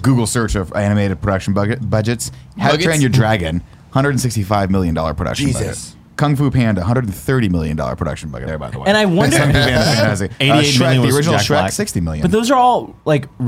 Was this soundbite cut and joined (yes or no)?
yes